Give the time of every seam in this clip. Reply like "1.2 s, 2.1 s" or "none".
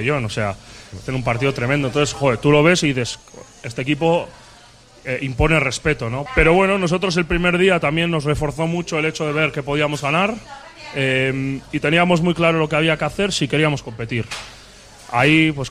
6.3 s